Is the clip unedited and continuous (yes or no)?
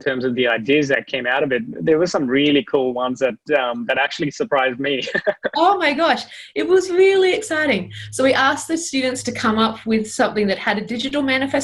yes